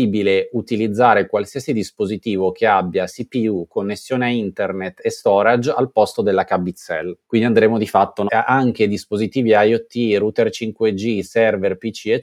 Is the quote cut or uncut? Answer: cut